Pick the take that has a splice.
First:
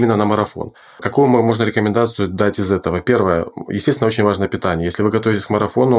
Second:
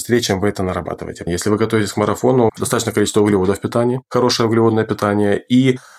second; 2 cuts; at 1.3 s, 2.5 s

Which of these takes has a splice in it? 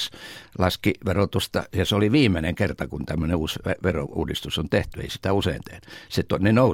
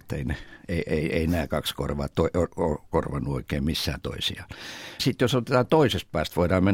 second; 1 cut; at 5.0 s

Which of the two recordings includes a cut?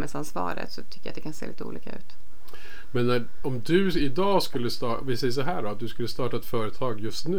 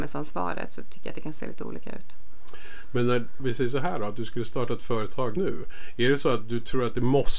second; 2 cuts; at 3.4 s, 5.4 s

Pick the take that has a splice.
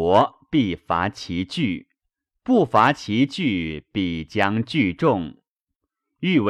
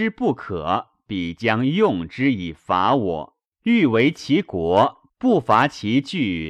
second; 2 cuts; at 3.5 s, 5.1 s

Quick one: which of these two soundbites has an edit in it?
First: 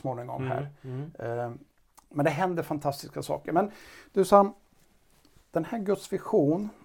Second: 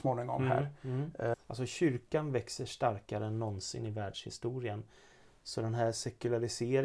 second; 1 cut; at 1.3 s

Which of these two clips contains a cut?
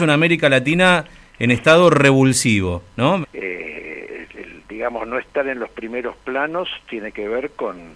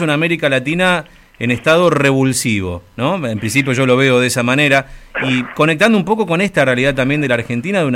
first; 2 cuts; at 3.2 s, 4.3 s

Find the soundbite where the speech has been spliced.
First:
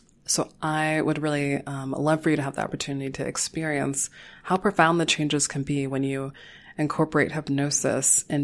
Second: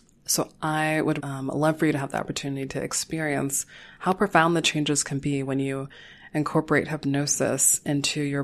second; 1 cut; at 1.2 s

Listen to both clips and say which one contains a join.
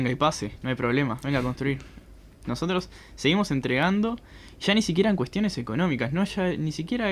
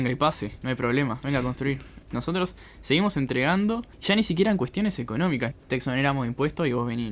second; 3 cuts; at 2.0 s, 3.9 s, 5.5 s

